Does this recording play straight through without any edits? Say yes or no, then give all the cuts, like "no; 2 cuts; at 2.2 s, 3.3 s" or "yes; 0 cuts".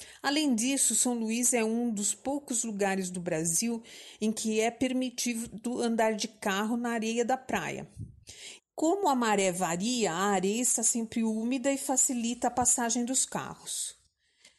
no; 1 cut; at 8.6 s